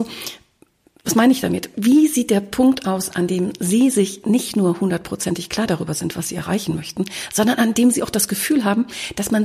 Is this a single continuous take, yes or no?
yes